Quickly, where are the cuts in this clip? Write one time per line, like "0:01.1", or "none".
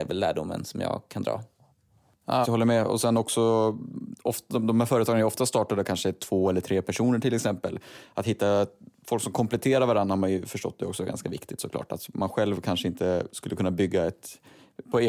0:02.4